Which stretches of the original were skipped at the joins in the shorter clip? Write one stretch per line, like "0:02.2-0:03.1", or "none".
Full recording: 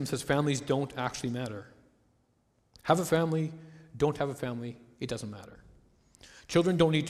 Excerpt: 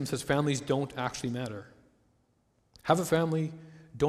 none